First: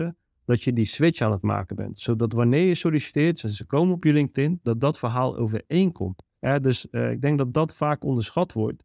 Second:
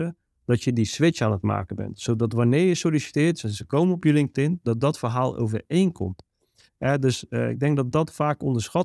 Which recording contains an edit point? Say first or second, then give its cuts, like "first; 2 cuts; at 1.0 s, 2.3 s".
first; 1 cut; at 6.4 s